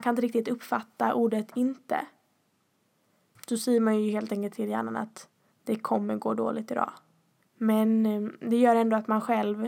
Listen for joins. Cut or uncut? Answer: cut